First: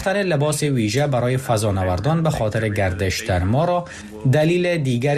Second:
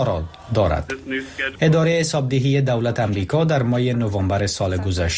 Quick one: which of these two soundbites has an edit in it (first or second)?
second